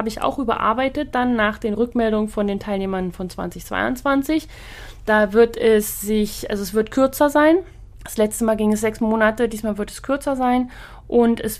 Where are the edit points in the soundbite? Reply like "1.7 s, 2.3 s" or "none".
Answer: 7.9 s